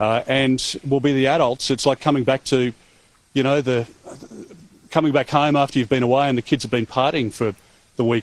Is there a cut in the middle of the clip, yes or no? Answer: no